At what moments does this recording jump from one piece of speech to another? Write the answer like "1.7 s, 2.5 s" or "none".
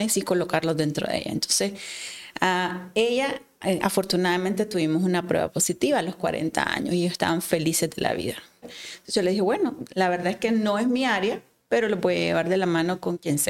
8.6 s